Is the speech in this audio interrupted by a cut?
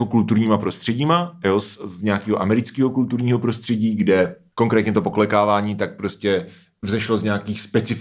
no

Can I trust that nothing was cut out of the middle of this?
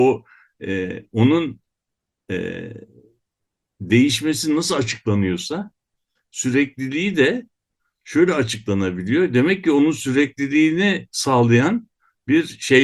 yes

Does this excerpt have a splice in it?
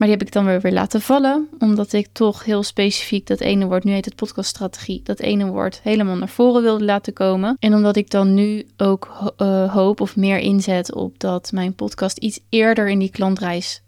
no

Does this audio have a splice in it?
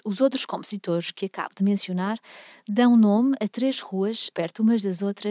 yes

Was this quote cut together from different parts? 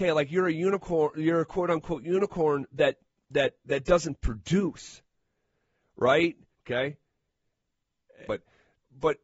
yes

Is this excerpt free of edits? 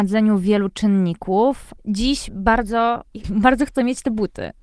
no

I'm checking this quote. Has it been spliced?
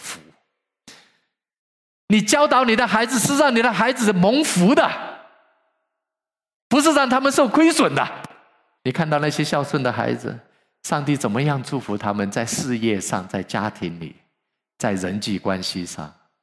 yes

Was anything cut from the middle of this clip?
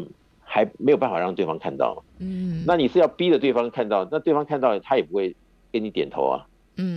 no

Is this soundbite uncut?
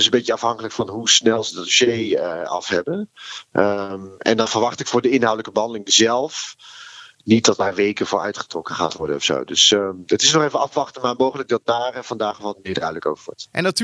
yes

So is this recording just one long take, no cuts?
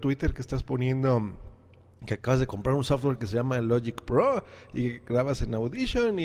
yes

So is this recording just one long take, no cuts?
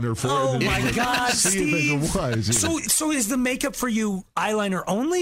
yes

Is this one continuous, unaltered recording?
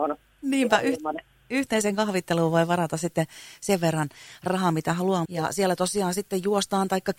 no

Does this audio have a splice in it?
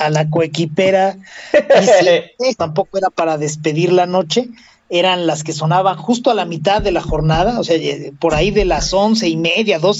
yes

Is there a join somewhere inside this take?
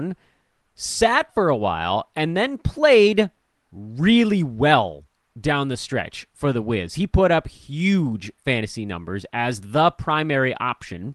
no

